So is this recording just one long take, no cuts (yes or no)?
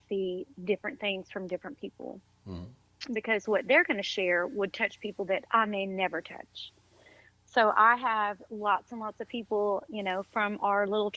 yes